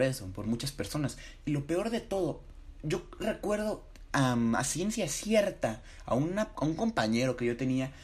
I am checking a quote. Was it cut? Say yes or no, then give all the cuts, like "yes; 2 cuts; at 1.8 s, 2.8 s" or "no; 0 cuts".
no; 0 cuts